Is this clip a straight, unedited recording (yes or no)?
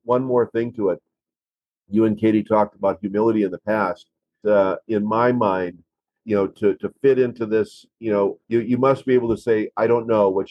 no